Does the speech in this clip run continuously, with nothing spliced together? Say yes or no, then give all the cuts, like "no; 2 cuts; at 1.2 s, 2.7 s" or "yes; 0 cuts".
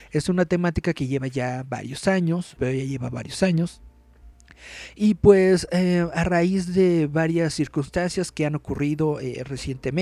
no; 1 cut; at 2.6 s